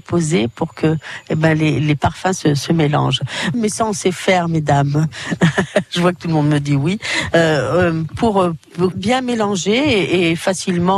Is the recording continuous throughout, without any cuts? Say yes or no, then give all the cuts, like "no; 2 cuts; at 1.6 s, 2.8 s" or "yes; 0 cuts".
no; 2 cuts; at 3.5 s, 8.9 s